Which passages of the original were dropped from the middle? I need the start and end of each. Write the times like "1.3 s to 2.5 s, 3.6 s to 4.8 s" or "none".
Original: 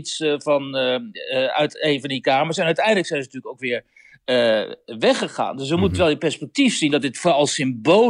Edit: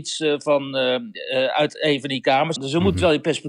2.6 s to 5.5 s